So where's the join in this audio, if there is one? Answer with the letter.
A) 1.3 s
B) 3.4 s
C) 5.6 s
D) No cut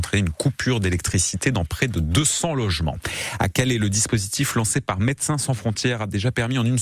D